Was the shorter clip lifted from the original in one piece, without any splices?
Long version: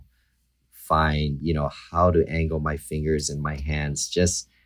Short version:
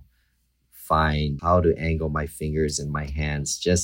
no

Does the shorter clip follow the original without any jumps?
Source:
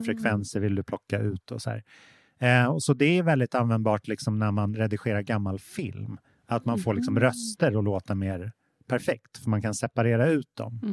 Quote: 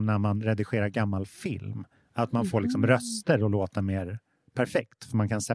yes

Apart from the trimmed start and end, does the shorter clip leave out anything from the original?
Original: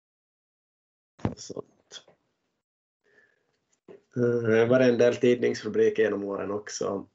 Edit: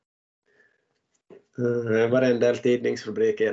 no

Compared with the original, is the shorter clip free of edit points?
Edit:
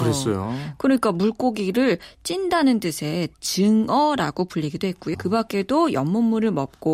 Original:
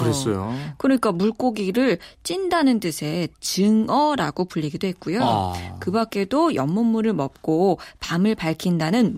no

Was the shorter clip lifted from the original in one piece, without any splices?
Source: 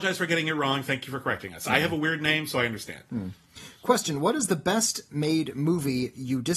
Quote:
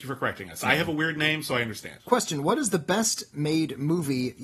no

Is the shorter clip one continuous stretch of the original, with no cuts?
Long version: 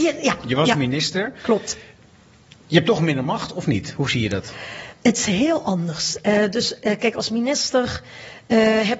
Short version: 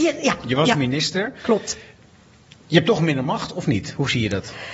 yes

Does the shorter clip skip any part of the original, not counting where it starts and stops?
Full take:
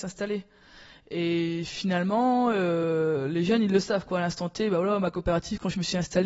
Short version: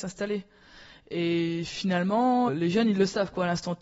yes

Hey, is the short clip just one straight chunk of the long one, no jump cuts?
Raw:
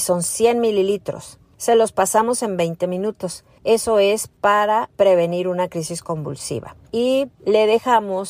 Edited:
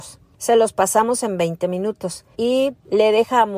no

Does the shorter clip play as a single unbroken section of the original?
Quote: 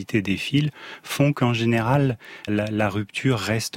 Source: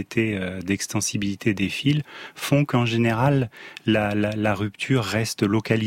no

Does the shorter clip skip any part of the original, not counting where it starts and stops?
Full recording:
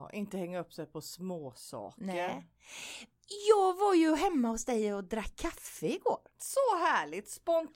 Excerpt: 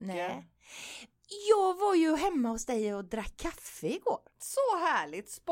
no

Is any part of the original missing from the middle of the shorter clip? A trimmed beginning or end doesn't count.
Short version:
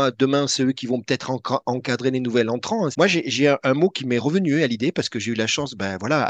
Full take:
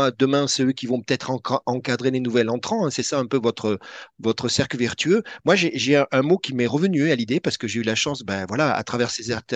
yes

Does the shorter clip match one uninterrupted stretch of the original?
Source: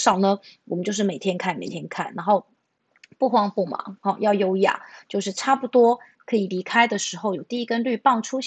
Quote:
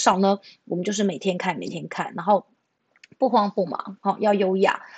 yes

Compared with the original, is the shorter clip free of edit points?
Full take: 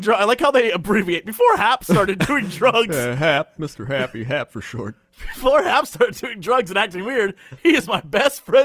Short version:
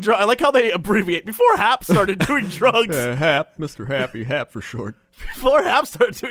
yes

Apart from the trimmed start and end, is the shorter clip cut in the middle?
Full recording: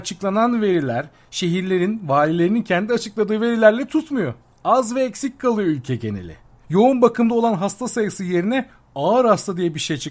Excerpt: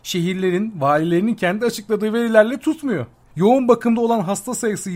yes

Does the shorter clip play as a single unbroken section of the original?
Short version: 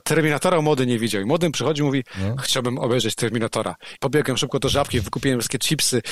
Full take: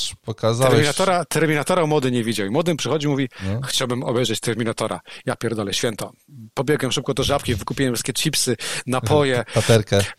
no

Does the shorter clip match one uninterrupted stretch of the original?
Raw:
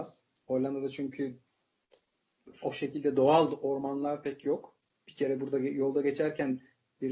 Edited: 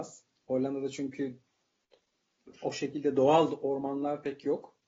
yes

